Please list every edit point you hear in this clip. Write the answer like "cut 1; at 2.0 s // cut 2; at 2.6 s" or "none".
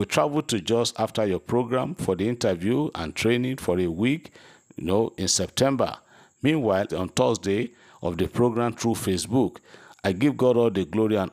cut 1; at 6.9 s